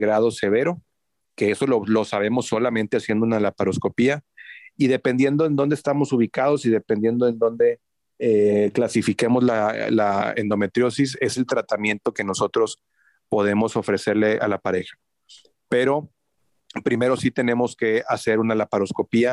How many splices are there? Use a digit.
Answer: 0